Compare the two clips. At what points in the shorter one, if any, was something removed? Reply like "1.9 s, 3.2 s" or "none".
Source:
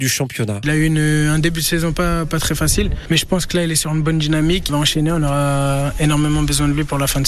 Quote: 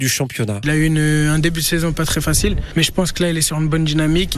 1.9 s